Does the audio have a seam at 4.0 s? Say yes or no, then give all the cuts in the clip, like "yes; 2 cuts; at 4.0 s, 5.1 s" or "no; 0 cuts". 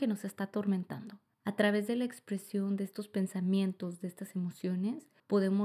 no; 1 cut; at 1.3 s